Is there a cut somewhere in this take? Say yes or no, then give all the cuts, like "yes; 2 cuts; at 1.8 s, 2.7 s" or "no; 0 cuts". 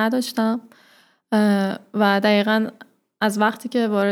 no; 0 cuts